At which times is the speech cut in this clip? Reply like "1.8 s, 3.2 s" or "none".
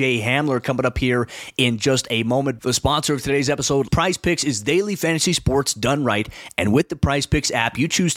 2.6 s, 3.9 s